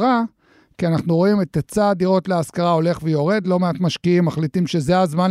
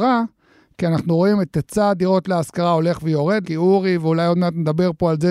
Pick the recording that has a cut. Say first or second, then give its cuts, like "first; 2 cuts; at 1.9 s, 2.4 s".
second; 1 cut; at 3.4 s